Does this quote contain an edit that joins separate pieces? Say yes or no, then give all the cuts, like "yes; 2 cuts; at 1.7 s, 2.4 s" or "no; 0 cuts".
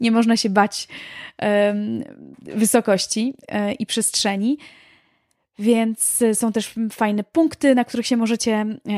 yes; 1 cut; at 2.3 s